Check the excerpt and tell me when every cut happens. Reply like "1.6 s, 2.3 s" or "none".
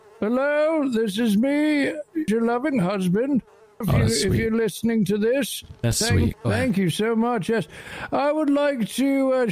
2.3 s, 3.8 s, 6.3 s